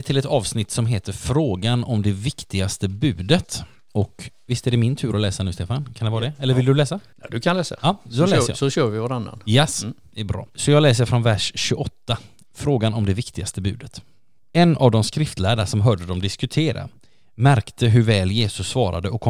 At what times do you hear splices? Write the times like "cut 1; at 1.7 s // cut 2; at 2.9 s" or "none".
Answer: none